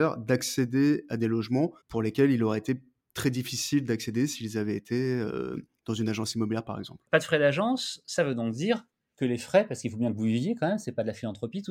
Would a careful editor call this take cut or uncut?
cut